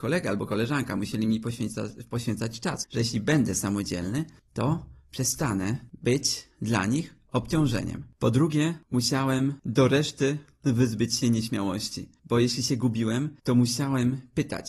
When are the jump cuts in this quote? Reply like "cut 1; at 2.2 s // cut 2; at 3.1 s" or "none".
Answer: cut 1; at 2.8 s